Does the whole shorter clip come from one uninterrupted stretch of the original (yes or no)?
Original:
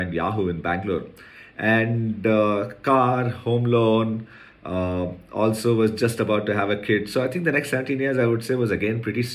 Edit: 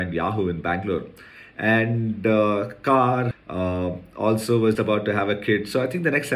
no